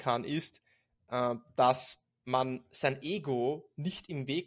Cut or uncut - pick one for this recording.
uncut